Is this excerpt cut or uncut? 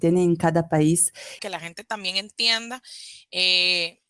cut